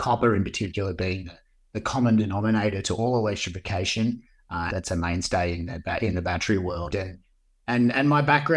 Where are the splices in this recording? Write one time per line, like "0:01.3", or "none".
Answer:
0:04.7
0:06.9